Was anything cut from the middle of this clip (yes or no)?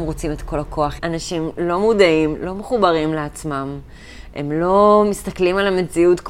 yes